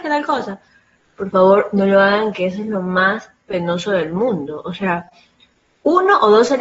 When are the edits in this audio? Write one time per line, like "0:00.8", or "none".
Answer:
0:01.0

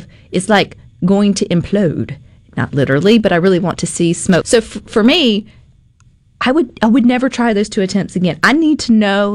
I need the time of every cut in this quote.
0:04.4

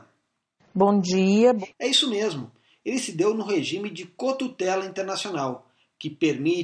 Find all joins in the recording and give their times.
0:01.7

